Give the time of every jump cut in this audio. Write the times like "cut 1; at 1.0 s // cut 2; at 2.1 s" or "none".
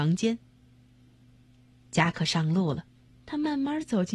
cut 1; at 3.1 s

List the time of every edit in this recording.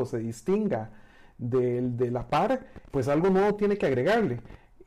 cut 1; at 2.9 s

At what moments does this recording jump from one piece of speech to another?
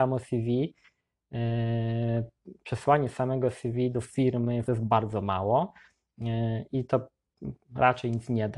cut 1; at 4.6 s

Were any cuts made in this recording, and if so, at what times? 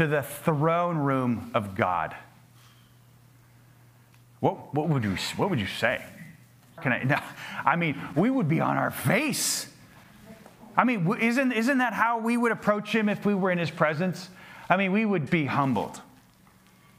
cut 1; at 6.8 s // cut 2; at 15.3 s

